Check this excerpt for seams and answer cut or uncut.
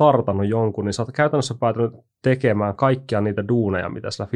uncut